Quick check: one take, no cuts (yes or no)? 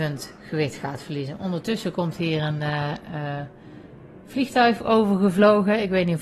yes